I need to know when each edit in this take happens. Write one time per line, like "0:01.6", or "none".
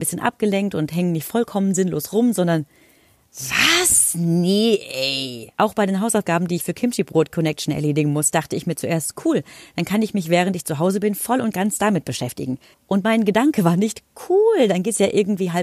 0:05.5
0:12.7